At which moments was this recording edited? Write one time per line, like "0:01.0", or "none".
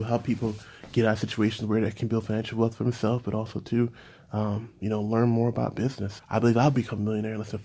0:06.2